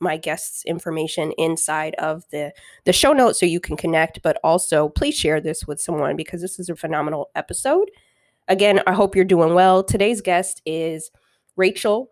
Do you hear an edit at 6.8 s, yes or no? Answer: yes